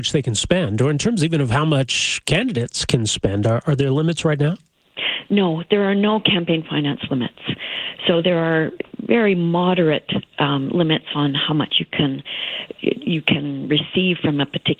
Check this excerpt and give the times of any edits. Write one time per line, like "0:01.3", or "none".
none

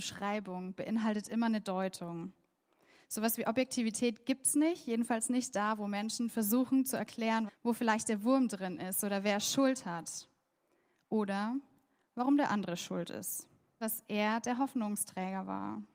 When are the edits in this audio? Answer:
0:07.5
0:13.8

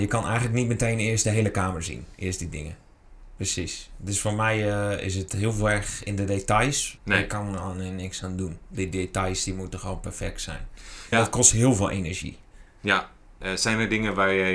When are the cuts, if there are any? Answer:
0:03.4
0:07.0
0:11.1

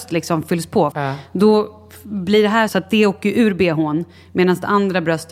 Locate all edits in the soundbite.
0:00.9
0:02.7

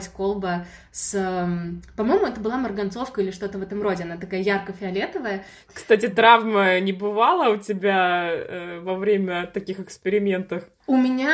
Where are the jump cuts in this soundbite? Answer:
0:05.6

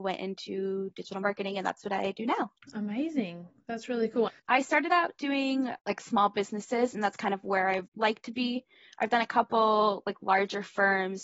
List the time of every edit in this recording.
0:04.3

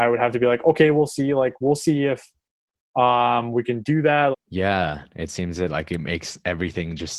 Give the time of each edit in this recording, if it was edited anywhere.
0:04.3

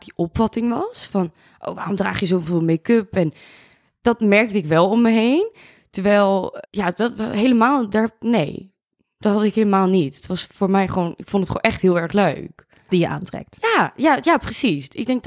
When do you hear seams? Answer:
0:06.6
0:12.9

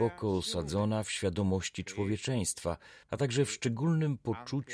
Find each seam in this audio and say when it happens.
0:03.0

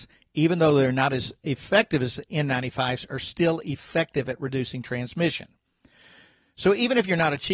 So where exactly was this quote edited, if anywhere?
none

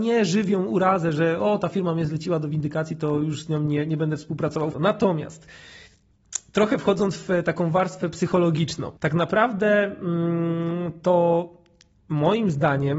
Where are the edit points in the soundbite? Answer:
0:04.7
0:09.0

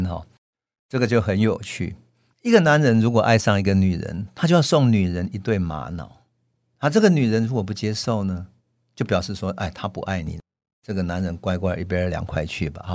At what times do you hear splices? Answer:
0:02.3

